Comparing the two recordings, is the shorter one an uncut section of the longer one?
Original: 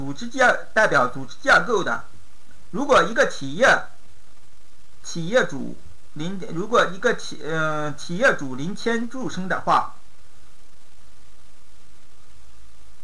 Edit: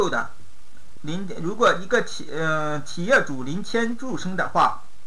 no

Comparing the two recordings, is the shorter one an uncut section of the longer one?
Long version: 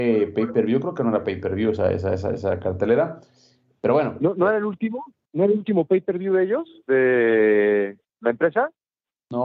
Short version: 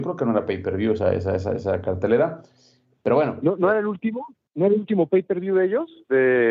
yes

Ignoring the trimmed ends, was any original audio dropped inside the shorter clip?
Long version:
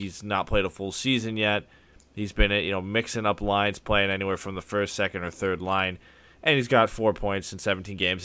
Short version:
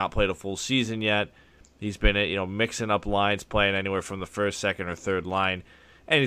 no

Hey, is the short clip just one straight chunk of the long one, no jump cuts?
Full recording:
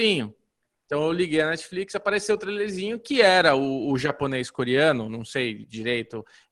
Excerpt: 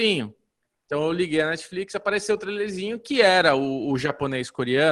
yes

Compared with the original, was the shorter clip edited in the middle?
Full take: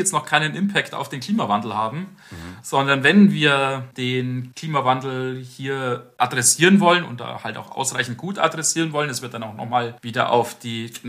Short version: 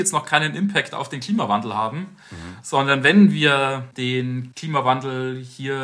no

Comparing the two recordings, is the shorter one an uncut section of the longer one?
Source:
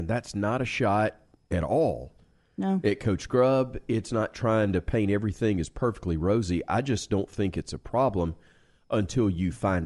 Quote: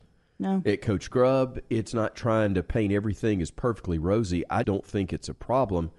no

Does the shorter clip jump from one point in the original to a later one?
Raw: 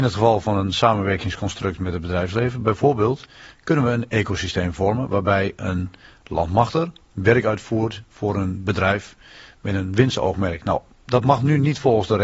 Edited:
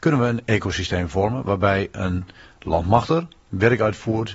no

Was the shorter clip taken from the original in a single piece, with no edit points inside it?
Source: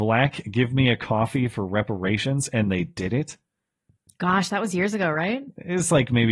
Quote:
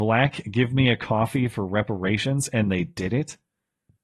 yes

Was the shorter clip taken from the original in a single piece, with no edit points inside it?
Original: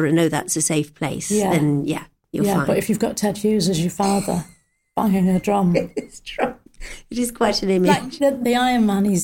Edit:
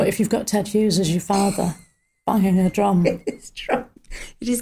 yes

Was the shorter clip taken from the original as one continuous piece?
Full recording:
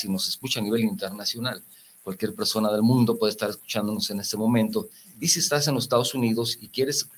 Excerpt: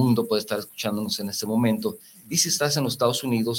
yes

